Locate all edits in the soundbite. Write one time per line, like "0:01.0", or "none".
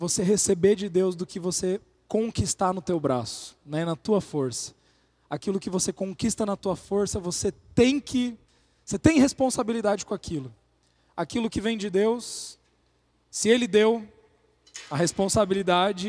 none